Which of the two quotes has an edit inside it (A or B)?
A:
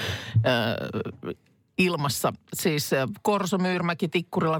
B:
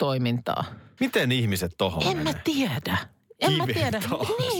B